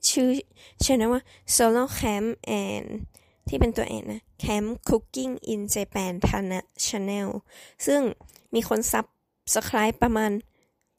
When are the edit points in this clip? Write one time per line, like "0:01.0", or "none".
none